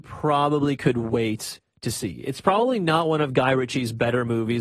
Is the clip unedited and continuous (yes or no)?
yes